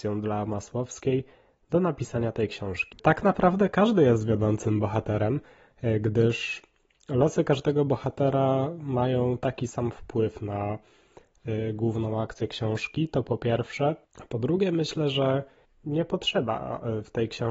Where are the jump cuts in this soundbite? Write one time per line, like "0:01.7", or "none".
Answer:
0:03.0

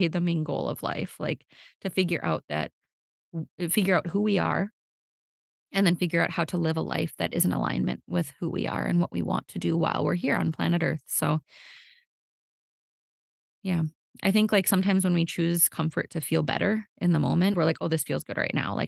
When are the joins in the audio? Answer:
0:17.5

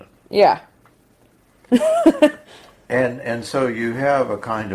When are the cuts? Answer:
0:01.7

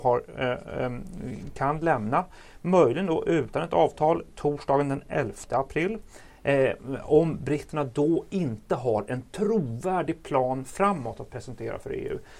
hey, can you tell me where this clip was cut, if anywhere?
none

